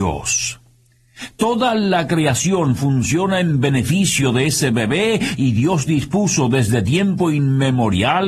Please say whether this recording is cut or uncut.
uncut